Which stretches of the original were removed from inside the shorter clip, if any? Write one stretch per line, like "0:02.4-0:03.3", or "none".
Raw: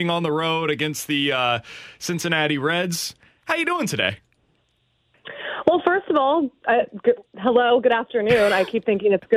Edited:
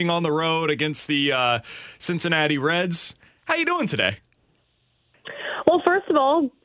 none